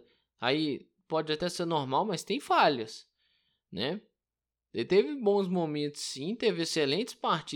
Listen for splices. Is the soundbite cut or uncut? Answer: cut